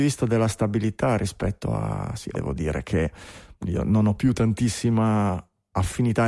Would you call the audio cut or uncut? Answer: cut